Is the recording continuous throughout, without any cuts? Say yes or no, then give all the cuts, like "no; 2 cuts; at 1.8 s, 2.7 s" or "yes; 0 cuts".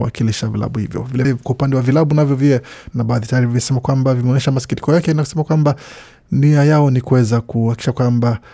no; 2 cuts; at 1.2 s, 2.9 s